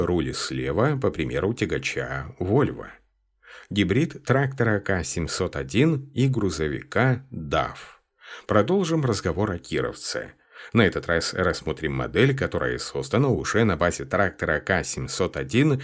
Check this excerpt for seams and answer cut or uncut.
uncut